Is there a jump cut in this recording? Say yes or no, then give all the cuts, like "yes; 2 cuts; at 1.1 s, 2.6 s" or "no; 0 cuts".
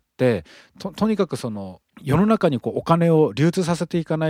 yes; 1 cut; at 1.9 s